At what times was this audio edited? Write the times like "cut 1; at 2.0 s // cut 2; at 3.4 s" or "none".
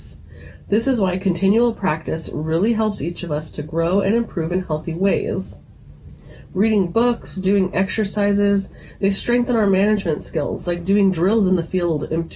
none